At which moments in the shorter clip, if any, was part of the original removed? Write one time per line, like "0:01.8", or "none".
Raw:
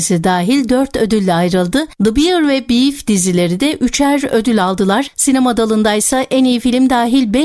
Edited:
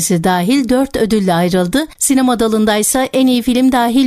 0:01.9

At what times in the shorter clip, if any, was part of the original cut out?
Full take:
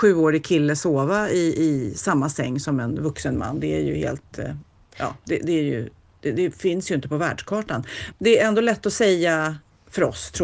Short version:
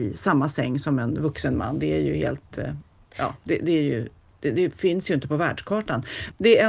none

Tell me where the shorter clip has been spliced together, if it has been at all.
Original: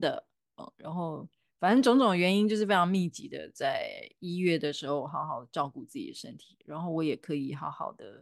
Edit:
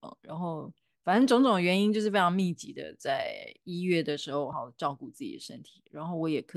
0:04.5

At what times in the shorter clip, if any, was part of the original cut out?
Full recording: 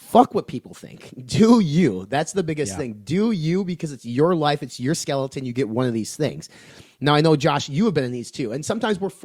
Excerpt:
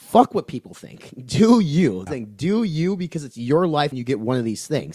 0:02.1
0:03.9

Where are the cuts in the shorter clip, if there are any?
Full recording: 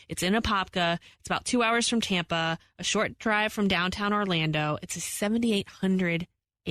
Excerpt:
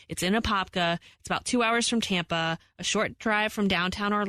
none

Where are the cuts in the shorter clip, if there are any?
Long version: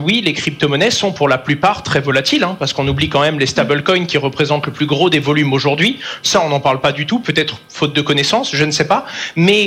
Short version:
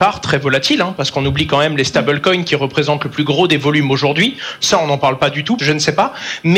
0:05.6

